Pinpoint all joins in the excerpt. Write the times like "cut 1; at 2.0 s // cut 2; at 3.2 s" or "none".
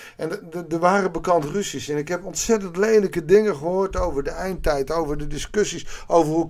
none